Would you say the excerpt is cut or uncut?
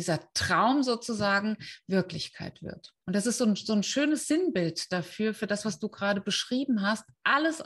cut